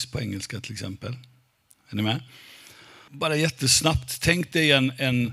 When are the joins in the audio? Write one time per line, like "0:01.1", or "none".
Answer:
0:03.1